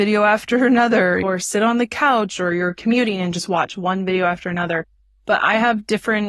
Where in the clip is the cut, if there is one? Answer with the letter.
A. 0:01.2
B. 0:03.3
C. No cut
A